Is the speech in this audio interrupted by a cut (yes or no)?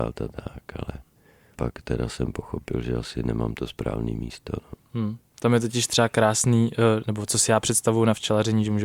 no